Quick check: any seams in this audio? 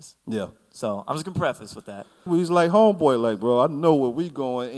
yes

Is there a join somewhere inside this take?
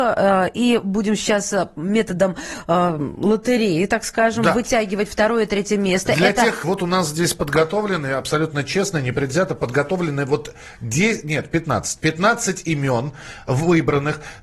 yes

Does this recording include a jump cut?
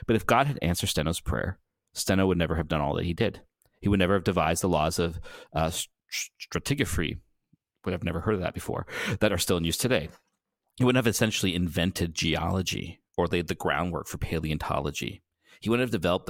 no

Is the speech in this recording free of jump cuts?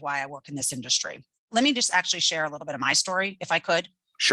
no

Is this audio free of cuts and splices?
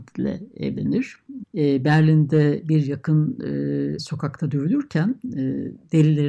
no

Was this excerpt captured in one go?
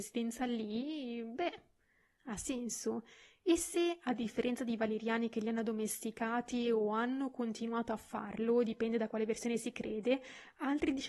yes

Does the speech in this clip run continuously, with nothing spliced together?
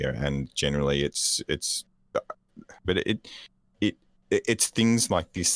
no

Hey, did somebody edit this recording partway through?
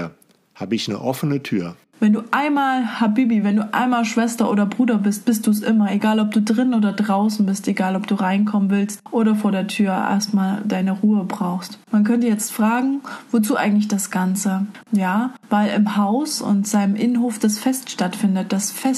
yes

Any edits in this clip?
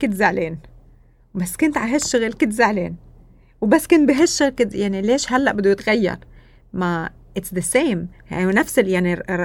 no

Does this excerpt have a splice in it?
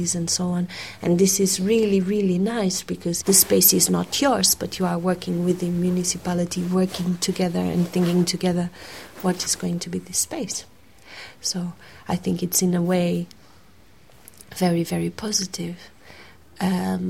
yes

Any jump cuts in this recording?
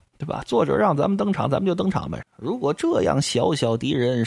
yes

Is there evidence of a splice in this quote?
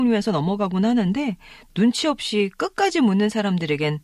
no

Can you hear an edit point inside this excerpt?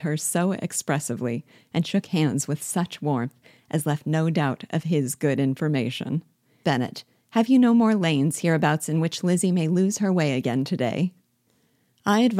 yes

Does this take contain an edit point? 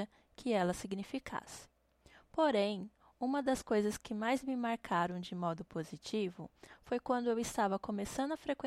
no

